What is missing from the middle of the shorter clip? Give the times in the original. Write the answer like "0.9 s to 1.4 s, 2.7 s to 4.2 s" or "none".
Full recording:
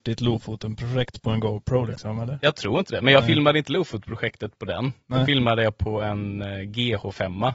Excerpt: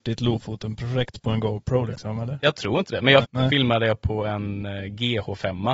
3.2 s to 5.0 s